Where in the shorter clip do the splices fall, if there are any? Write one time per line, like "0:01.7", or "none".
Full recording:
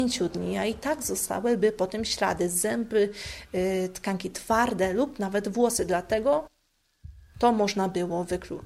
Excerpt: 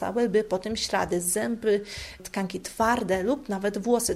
0:02.2